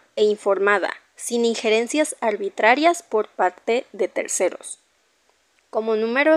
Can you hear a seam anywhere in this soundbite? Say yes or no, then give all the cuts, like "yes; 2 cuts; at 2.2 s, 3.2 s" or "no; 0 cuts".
no; 0 cuts